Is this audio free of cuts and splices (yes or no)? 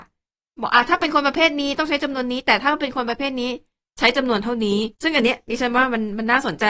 no